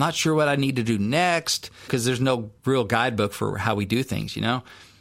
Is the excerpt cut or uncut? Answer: cut